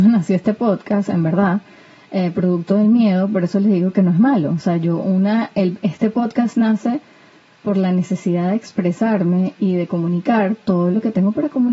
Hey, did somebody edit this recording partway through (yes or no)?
no